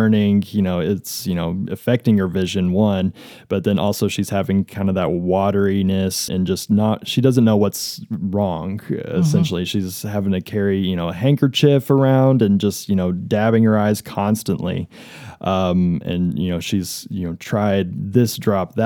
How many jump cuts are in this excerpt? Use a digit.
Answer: 1